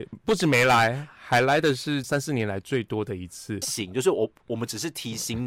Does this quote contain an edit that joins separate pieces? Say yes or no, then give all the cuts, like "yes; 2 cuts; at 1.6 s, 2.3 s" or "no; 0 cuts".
yes; 2 cuts; at 2.0 s, 3.6 s